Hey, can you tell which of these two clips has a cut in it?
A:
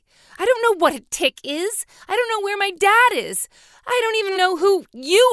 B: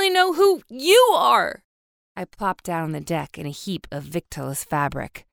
A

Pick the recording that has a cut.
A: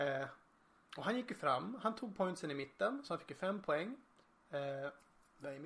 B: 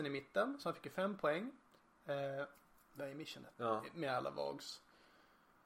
B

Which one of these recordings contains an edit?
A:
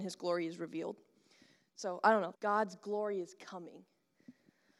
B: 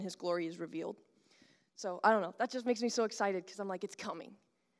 A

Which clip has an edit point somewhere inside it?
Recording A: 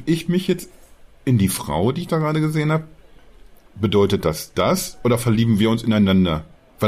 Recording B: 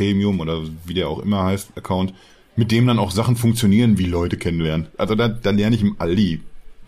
B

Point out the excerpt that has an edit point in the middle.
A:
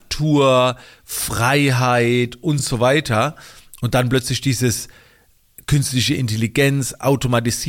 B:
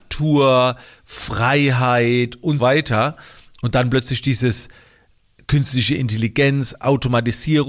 B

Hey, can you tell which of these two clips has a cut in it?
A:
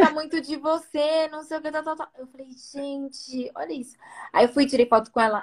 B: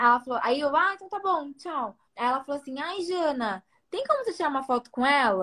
B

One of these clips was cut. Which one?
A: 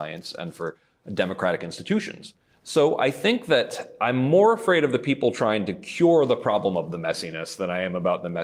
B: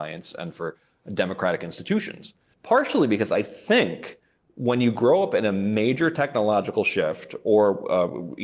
B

